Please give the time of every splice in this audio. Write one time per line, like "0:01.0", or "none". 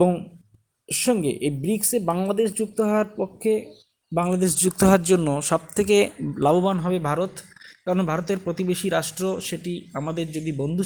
0:01.1